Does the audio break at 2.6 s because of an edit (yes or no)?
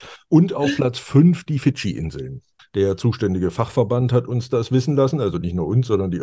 yes